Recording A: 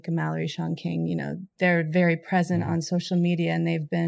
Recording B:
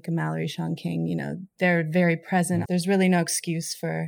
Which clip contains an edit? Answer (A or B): B